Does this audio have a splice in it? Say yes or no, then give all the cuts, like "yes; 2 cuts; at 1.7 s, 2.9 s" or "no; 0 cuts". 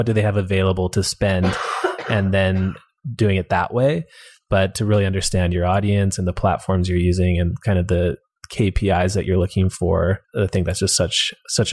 yes; 1 cut; at 10.2 s